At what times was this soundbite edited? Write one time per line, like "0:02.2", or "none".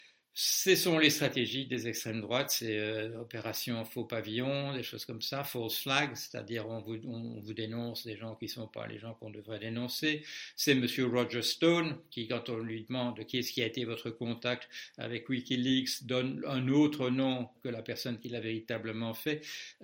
0:17.6